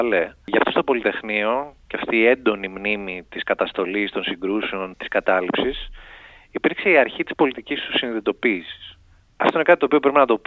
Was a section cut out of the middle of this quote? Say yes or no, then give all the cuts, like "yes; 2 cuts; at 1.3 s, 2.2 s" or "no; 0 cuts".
yes; 2 cuts; at 4.9 s, 9.2 s